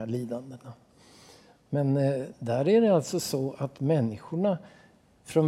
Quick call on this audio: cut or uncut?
cut